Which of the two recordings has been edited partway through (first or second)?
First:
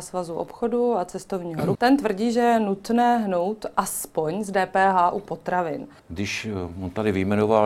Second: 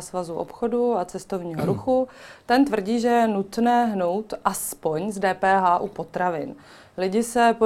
first